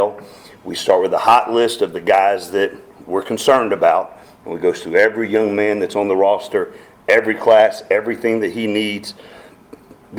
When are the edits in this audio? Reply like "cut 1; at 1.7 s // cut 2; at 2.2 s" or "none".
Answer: none